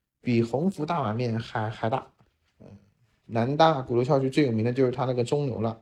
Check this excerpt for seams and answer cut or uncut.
cut